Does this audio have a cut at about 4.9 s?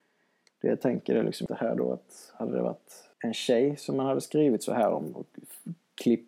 no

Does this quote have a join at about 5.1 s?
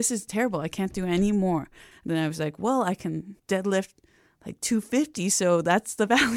no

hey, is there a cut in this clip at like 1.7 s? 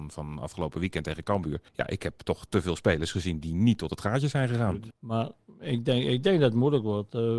yes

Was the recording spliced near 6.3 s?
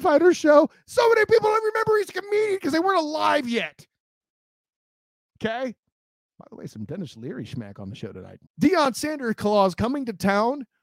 no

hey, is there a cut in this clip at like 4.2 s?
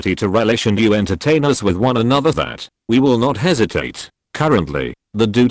no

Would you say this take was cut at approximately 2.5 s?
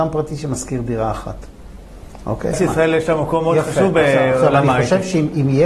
yes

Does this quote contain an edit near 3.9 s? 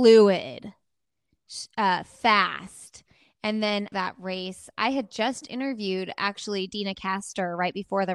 yes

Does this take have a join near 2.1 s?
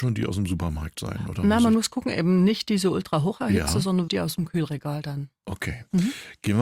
no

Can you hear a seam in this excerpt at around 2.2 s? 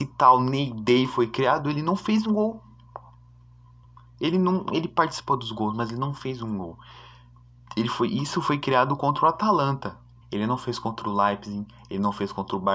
yes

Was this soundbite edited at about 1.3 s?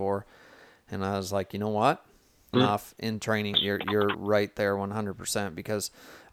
no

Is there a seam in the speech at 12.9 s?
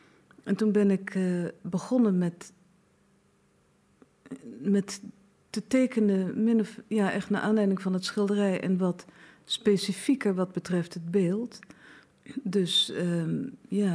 no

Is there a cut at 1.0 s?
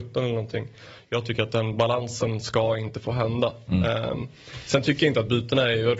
no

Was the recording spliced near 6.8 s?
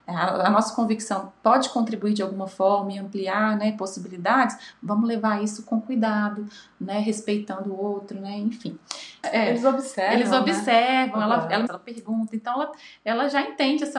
no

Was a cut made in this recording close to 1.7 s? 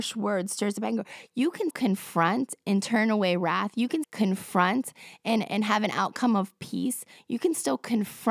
yes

